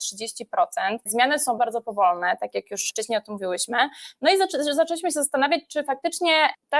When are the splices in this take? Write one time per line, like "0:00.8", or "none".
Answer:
0:01.6